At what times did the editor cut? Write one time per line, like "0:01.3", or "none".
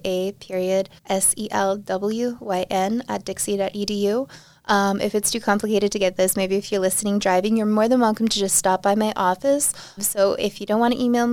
0:01.0
0:10.0